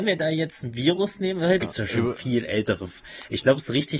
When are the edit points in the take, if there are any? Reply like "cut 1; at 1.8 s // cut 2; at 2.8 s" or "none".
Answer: cut 1; at 1.6 s